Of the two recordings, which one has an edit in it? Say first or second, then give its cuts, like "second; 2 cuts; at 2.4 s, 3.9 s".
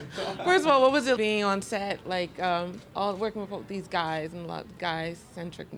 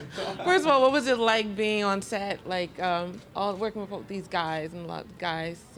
first; 1 cut; at 1.2 s